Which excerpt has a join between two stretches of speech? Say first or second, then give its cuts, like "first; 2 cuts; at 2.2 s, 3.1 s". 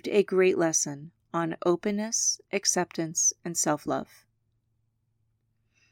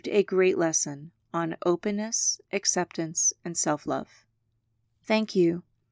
second; 1 cut; at 4.8 s